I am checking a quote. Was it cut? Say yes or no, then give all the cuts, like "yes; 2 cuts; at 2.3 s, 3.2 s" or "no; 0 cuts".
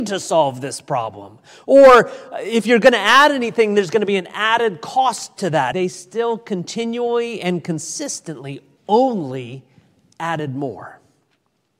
yes; 2 cuts; at 5.7 s, 8.8 s